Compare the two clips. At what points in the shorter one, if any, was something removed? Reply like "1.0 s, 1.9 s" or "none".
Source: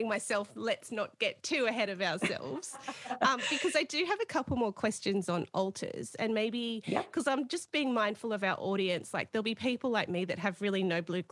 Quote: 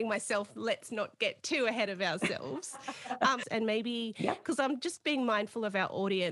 3.4 s

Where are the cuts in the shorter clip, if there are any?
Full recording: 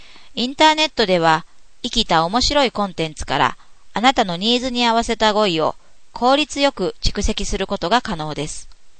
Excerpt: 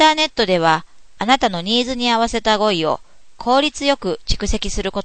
1.2 s

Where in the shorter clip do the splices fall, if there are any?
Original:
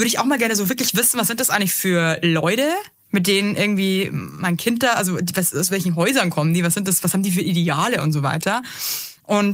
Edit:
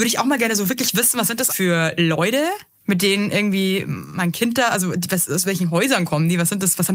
1.5 s

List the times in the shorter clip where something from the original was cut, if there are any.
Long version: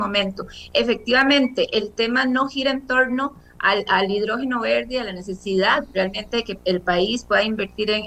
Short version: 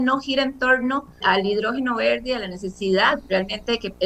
1.2 s

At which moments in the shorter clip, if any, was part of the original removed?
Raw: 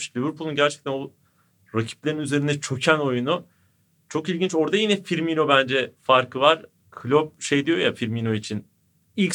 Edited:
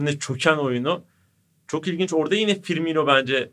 none

